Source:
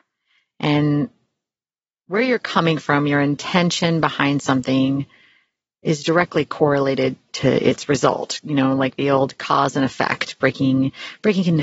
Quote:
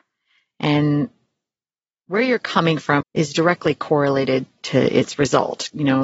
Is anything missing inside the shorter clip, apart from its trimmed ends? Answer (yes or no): yes